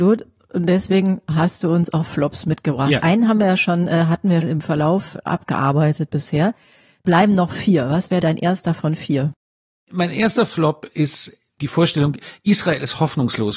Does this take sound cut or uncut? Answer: cut